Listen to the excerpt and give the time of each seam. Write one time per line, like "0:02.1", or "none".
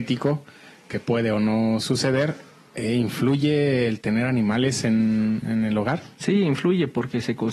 0:05.4